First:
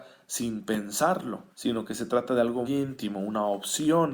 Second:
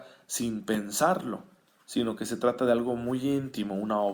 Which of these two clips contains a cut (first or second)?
first